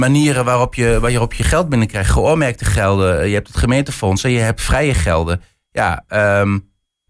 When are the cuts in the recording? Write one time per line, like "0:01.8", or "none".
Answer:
none